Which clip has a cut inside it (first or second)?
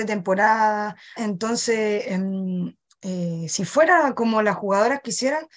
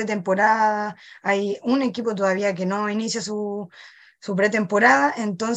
first